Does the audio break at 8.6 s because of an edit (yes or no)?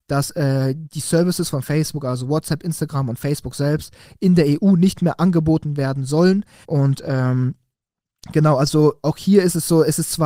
no